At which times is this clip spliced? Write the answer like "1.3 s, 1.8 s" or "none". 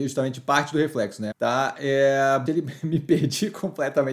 1.3 s, 2.5 s

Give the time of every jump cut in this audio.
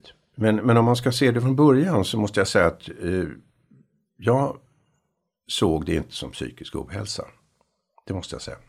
none

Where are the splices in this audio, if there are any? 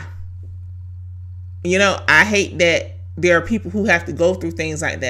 none

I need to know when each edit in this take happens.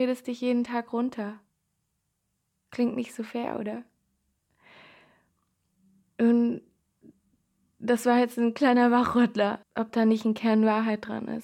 9.6 s

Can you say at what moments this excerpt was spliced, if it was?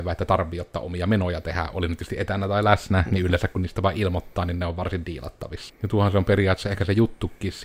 5.7 s

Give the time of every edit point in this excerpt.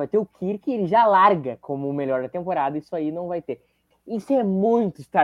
3.9 s

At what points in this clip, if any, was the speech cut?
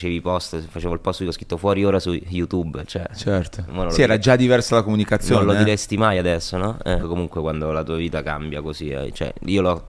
7.0 s

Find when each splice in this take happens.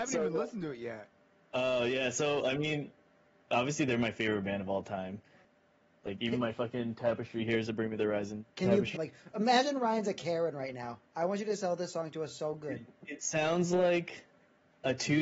8.9 s

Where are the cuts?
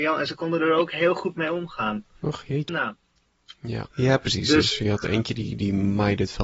2.7 s, 3.9 s

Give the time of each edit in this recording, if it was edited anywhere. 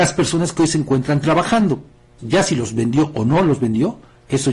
2.2 s

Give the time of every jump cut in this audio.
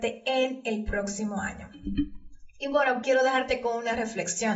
3.0 s

